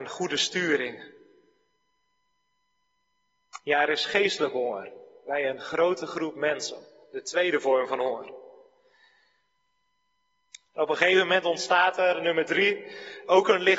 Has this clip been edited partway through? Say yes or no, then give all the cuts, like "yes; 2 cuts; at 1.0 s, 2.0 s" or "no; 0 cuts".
no; 0 cuts